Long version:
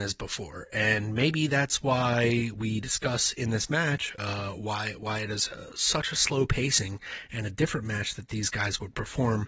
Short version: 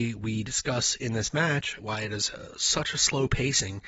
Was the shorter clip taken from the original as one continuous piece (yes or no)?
no